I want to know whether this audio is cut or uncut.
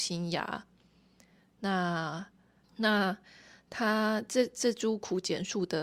cut